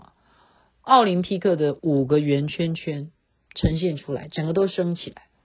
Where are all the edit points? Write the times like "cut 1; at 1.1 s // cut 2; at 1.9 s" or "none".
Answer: none